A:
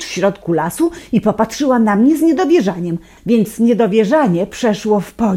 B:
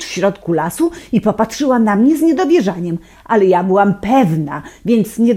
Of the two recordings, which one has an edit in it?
A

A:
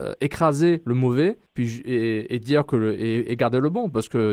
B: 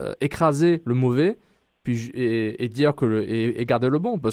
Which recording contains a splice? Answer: A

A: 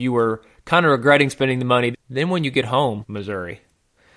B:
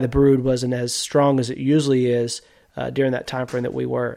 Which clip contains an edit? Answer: A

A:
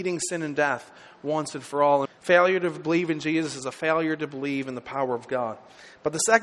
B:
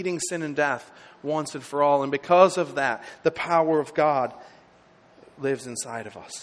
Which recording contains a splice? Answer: A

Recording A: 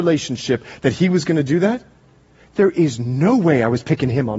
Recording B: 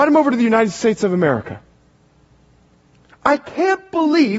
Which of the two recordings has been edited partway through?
B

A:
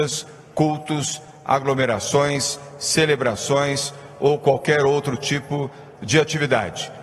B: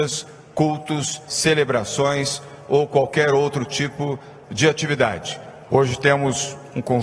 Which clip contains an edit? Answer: B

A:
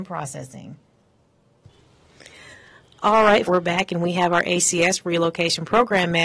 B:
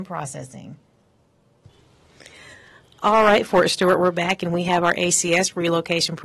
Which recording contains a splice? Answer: A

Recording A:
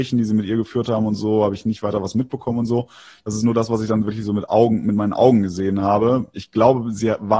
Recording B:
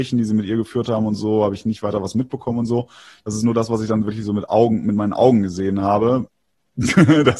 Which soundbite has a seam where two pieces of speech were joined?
B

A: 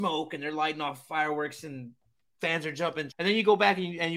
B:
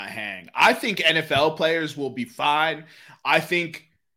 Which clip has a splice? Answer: A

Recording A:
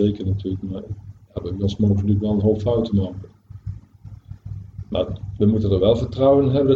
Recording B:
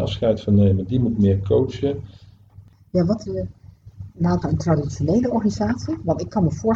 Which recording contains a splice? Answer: B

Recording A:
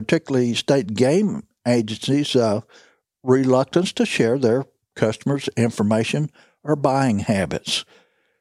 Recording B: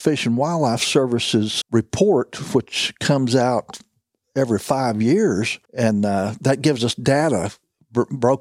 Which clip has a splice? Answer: B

